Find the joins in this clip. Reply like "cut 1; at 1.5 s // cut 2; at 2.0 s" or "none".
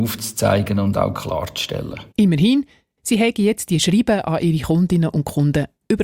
cut 1; at 2.1 s